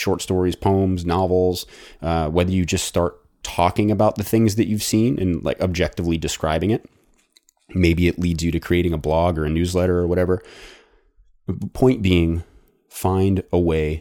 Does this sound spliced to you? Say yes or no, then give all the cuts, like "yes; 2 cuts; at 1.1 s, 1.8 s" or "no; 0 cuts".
no; 0 cuts